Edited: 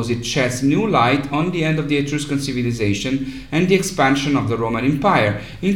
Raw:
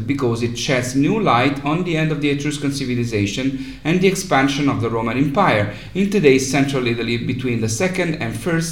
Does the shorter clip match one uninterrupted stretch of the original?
yes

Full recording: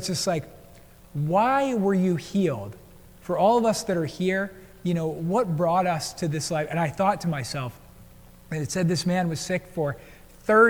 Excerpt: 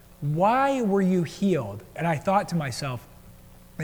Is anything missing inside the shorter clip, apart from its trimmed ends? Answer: yes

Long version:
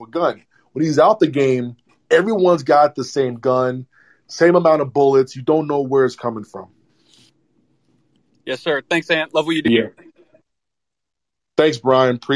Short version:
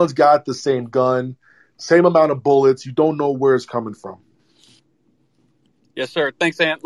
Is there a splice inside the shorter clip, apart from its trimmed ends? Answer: no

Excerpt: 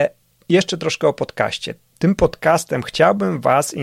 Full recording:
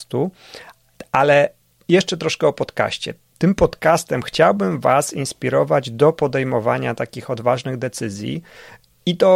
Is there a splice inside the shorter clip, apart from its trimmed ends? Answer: no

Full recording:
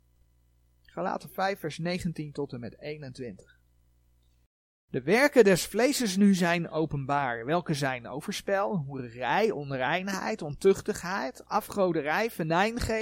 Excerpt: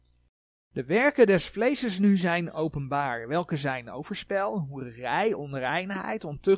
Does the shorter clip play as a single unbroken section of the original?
yes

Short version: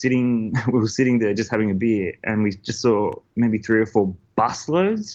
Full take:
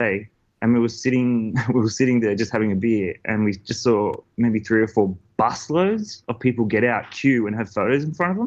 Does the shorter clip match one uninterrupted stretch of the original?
yes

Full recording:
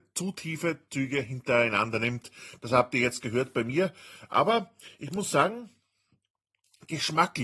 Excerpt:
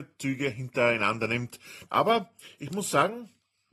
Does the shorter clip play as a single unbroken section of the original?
no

